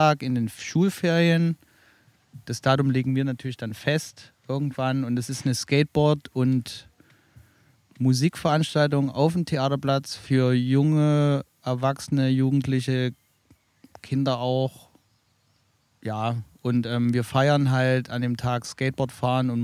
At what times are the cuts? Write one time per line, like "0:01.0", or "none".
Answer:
none